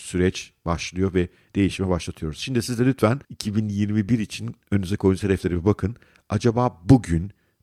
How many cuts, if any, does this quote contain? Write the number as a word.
one